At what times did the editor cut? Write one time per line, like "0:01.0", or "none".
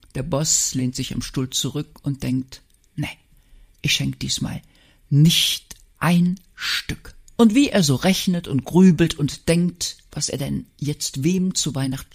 0:07.4